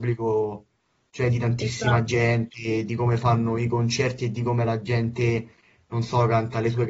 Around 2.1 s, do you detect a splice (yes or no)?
no